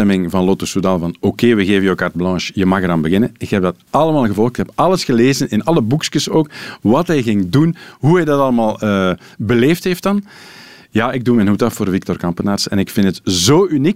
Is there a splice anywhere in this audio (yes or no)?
no